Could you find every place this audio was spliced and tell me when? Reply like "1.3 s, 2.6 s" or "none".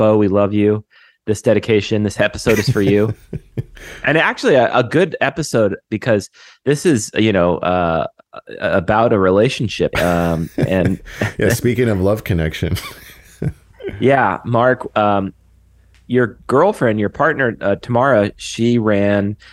9.9 s